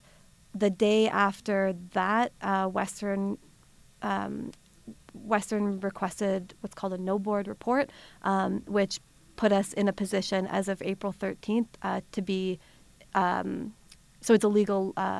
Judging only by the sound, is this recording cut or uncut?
uncut